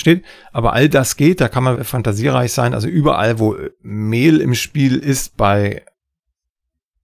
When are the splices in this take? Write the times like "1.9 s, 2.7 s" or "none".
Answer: 1.8 s